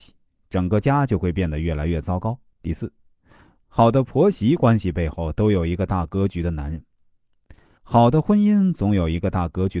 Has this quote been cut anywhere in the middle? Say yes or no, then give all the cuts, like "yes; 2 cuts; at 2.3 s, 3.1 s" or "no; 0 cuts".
yes; 2 cuts; at 2.5 s, 7.8 s